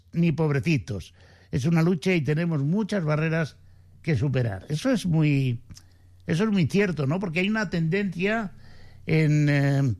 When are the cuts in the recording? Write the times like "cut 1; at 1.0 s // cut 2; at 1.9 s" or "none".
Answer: none

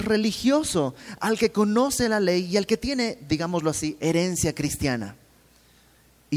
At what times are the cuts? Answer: none

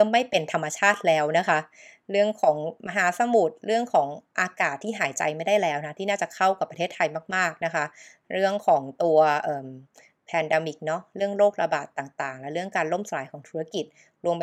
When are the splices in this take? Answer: none

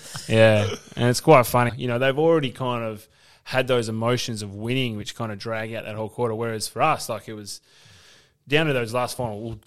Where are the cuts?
cut 1; at 1.7 s

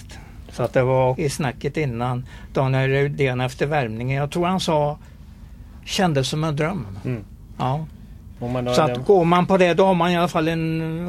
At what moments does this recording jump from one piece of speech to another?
cut 1; at 1.1 s

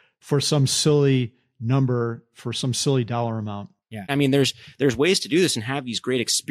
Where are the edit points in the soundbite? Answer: cut 1; at 4.1 s

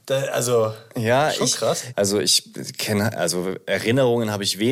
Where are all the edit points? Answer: cut 1; at 1.9 s

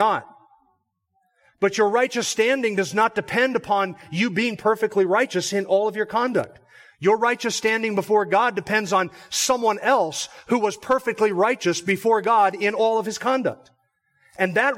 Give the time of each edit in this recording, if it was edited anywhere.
none

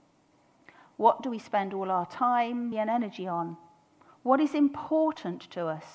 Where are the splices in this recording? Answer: cut 1; at 2.7 s

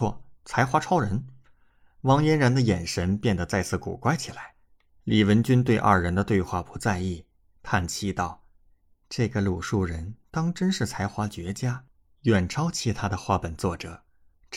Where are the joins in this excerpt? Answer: cut 1; at 4.9 s

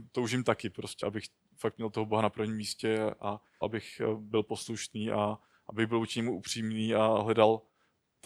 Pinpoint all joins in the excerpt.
cut 1; at 1.0 s // cut 2; at 3.6 s

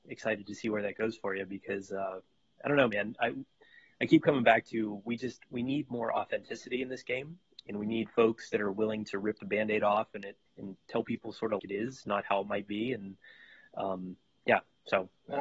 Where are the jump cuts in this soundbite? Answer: cut 1; at 10.5 s // cut 2; at 11.6 s

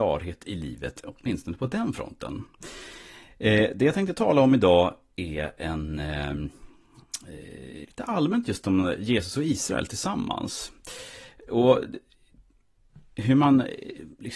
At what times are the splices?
cut 1; at 7.8 s

